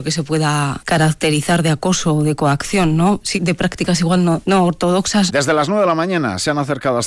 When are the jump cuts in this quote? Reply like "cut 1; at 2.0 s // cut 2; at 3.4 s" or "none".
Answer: cut 1; at 3.3 s // cut 2; at 5.3 s

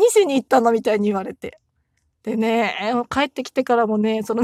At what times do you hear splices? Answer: cut 1; at 2.1 s

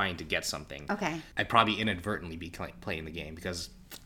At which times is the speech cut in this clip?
cut 1; at 1.3 s

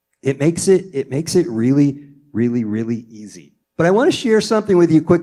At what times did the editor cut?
cut 1; at 3.6 s

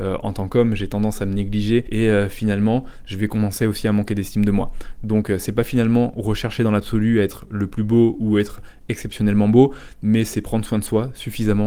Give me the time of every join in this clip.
cut 1; at 1.9 s

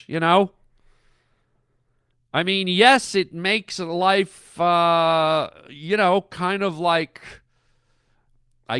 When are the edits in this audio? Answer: none

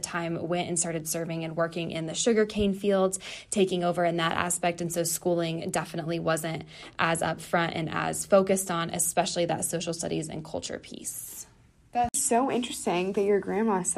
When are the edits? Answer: none

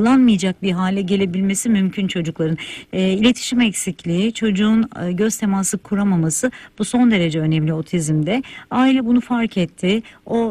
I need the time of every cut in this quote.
cut 1; at 2.9 s

